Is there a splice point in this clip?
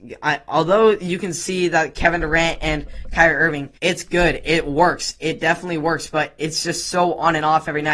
yes; 1 cut; at 3.8 s

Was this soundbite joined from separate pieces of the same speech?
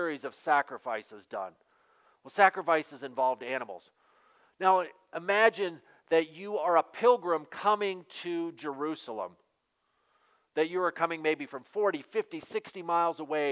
no; 0 cuts

